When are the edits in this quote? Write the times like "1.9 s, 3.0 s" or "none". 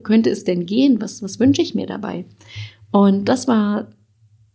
none